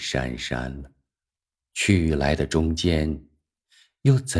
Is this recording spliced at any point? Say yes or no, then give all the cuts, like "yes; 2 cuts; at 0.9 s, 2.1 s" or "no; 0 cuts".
yes; 1 cut; at 1.6 s